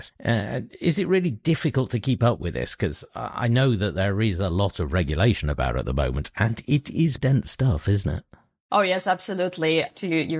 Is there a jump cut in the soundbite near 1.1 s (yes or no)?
no